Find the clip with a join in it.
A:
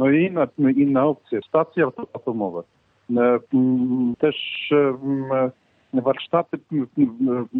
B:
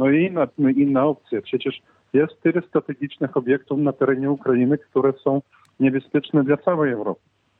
A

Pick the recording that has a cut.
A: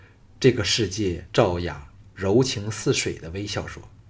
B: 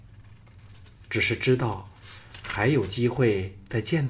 A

